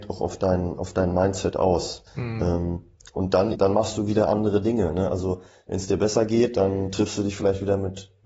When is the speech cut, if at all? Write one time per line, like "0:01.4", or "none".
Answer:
0:02.1
0:03.5